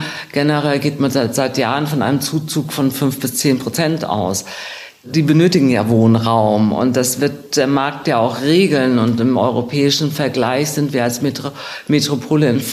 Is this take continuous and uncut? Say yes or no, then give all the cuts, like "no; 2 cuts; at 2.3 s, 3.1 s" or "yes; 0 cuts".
yes; 0 cuts